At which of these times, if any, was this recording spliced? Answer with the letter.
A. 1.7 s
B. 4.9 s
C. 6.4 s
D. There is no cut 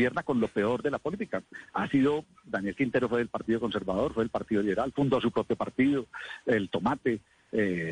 B